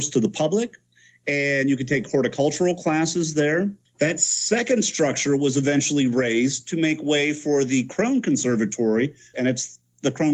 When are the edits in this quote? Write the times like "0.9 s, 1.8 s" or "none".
3.9 s, 9.3 s